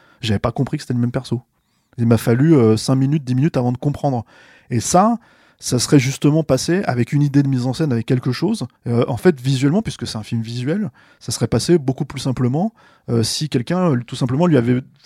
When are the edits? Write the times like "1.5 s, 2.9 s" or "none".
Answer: 8.8 s